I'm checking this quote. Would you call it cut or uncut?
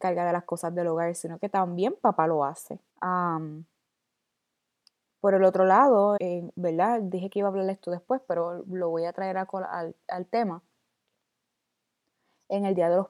cut